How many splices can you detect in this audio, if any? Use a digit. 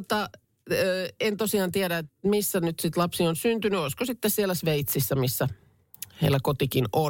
1